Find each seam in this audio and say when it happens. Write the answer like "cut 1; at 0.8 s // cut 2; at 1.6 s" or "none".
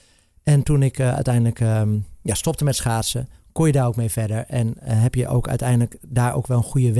none